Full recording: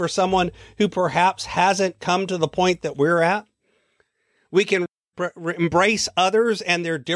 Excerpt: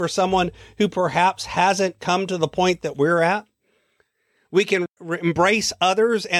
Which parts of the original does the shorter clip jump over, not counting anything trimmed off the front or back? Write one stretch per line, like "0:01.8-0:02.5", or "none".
0:05.0-0:05.3